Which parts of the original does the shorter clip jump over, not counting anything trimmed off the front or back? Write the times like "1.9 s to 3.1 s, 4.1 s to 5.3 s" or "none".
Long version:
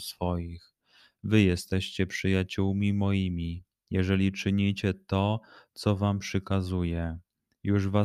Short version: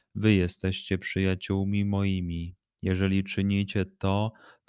none